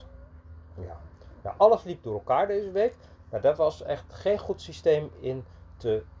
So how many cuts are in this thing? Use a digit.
0